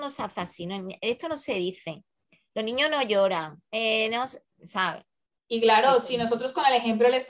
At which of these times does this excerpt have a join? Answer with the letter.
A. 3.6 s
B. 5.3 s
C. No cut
B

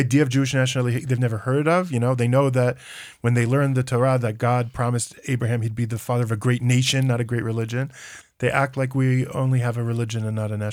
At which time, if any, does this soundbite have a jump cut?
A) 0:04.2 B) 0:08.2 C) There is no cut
B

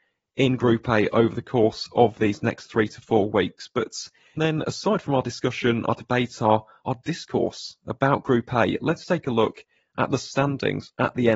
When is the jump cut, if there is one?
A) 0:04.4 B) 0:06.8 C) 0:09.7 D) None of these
A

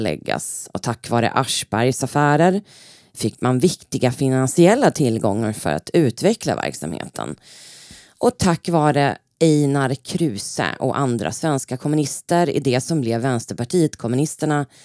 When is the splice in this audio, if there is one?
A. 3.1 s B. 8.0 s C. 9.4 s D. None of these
D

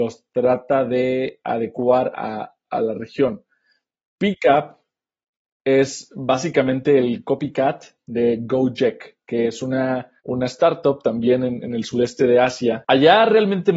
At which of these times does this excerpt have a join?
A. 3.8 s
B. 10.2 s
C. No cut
B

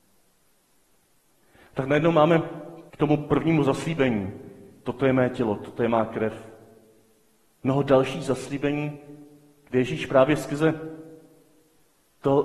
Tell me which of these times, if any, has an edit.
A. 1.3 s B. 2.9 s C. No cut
B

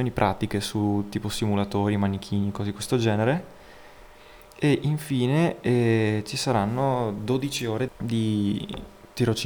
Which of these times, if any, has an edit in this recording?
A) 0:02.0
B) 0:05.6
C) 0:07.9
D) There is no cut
C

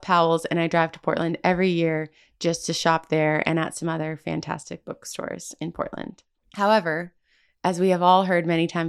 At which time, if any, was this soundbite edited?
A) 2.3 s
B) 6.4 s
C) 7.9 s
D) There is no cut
B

